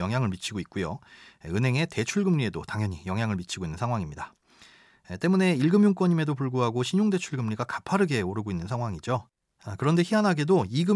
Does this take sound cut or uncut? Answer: uncut